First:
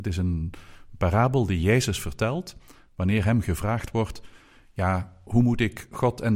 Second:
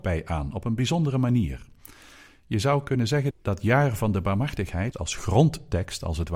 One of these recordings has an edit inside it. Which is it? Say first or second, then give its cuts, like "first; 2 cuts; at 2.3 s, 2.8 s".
second; 2 cuts; at 3.3 s, 4.9 s